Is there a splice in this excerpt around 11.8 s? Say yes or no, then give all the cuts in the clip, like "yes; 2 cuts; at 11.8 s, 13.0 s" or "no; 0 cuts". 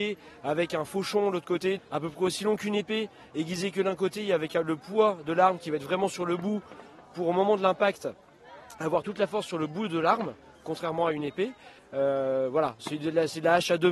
yes; 2 cuts; at 1.8 s, 11.8 s